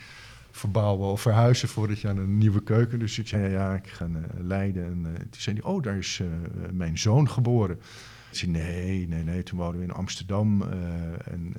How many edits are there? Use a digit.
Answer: 2